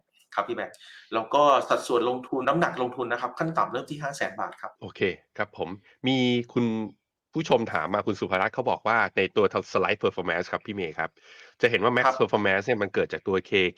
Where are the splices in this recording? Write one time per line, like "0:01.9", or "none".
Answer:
0:02.4
0:04.8